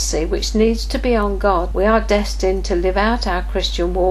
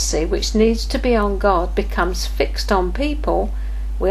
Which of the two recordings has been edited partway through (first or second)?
first